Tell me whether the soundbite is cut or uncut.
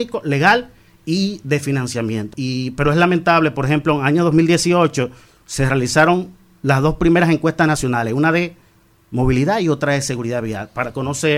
cut